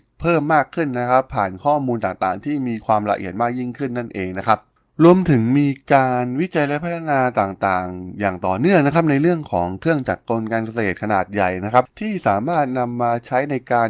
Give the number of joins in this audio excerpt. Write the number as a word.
zero